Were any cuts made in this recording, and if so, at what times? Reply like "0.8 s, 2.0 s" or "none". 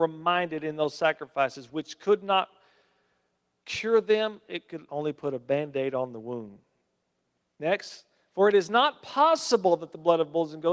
4.9 s